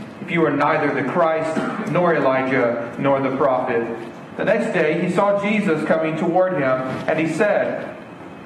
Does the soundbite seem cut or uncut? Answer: cut